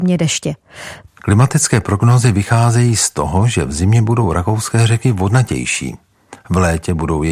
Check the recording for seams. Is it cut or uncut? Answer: cut